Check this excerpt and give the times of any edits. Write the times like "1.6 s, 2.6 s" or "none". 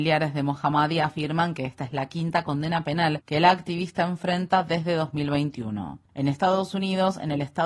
6.1 s